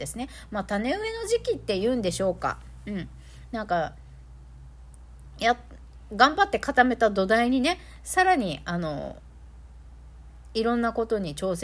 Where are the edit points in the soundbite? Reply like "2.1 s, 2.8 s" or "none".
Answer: none

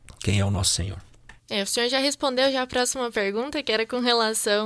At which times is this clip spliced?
1.4 s

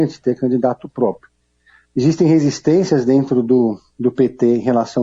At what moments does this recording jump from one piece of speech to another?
none

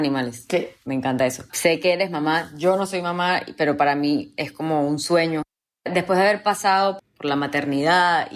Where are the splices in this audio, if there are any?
7.0 s

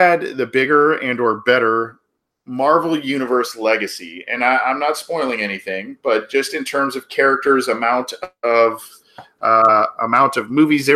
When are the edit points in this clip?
none

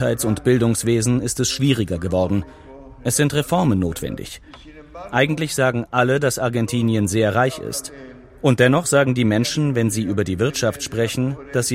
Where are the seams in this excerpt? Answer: none

